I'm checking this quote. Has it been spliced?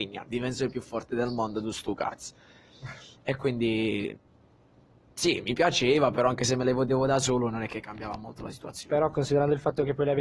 no; 0 cuts

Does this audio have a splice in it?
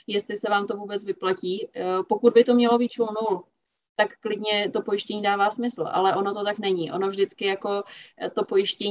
no; 0 cuts

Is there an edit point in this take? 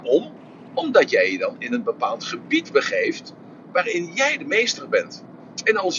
no; 0 cuts

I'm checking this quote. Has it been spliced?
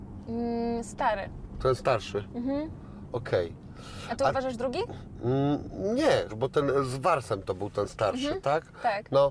yes; 1 cut; at 6.3 s

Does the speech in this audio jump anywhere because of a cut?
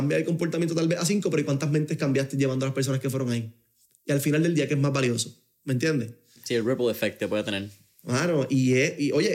yes; 1 cut; at 6.4 s

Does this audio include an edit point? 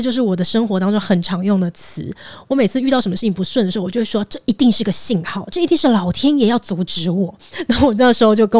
no; 0 cuts

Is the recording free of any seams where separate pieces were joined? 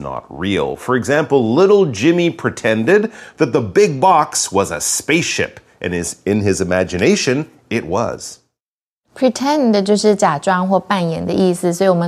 yes; 0 cuts

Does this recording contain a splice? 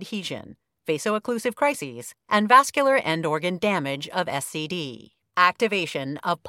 no; 0 cuts

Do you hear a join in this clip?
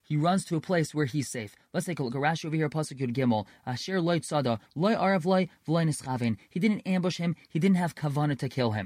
no; 0 cuts

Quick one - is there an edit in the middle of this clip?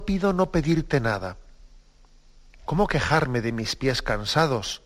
yes; 1 cut; at 2.7 s

